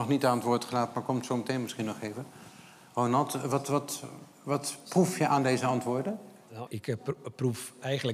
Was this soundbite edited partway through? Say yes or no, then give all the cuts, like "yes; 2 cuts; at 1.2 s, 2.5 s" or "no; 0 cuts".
yes; 1 cut; at 6.7 s